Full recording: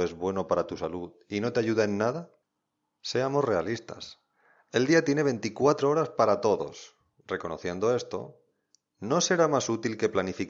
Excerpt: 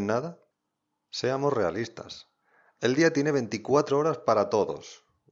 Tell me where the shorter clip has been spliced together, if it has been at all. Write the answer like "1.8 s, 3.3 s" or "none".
none